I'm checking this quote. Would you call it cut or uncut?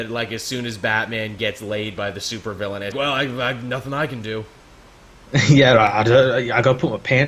cut